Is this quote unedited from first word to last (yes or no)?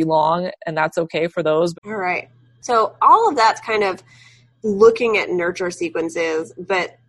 no